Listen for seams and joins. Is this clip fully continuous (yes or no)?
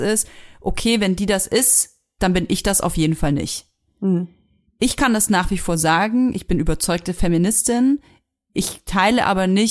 yes